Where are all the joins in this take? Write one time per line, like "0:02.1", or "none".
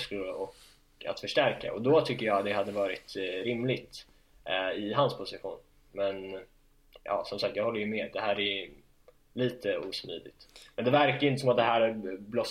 none